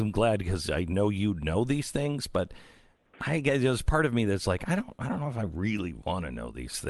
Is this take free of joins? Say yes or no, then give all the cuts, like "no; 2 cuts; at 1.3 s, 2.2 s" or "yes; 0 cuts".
yes; 0 cuts